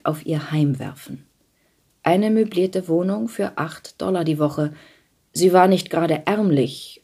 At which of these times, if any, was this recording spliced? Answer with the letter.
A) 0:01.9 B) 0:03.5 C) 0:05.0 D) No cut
D